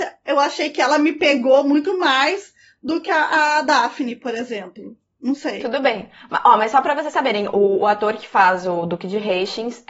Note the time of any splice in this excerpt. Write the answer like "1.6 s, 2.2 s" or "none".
none